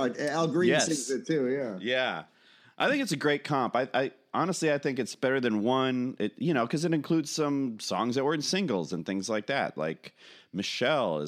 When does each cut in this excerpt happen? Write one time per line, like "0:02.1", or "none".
none